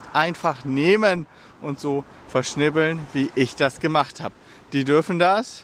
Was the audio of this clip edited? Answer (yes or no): no